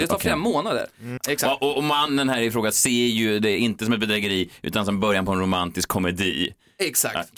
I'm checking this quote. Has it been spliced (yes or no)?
yes